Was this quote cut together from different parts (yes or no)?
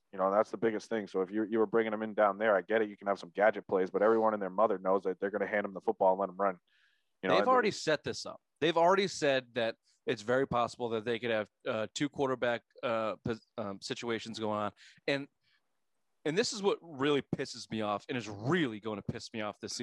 no